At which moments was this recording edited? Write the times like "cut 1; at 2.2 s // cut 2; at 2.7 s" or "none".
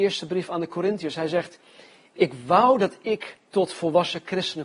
cut 1; at 2.2 s